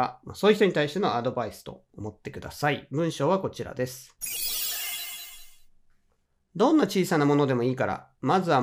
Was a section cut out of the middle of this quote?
no; 0 cuts

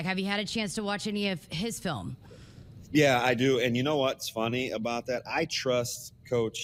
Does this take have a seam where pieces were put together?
no; 0 cuts

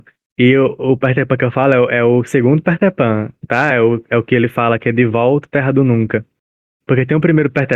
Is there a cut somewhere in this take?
no; 0 cuts

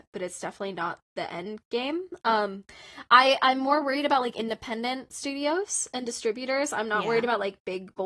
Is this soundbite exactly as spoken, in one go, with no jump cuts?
yes; 0 cuts

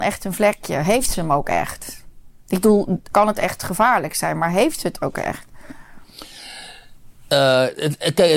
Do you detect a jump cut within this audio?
yes; 1 cut; at 3.1 s

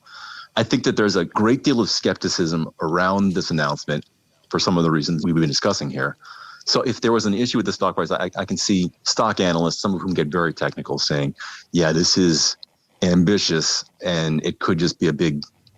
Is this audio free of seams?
no; 1 cut; at 9.0 s

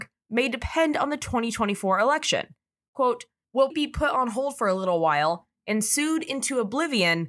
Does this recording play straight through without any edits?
no; 1 cut; at 3.7 s

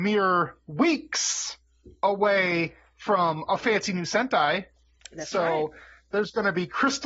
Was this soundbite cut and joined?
no; 0 cuts

